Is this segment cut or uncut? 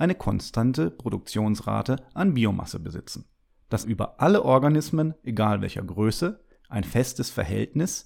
cut